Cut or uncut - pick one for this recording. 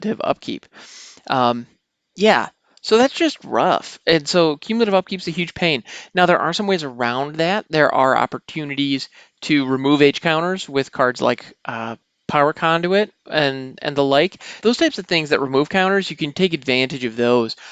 cut